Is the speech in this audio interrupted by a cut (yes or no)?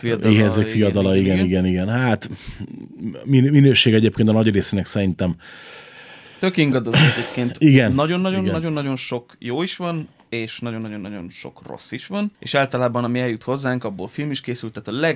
yes